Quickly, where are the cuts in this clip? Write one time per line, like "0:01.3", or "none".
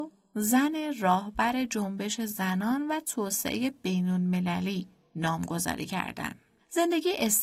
none